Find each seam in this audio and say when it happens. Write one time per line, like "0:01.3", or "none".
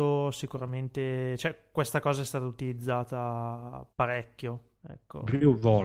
0:03.9